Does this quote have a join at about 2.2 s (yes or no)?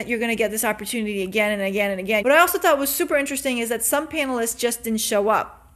yes